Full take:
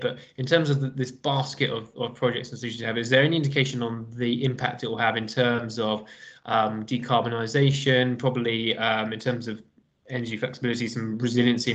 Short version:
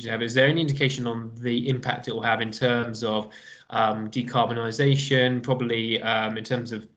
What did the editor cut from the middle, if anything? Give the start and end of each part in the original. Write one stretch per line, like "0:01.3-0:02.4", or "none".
none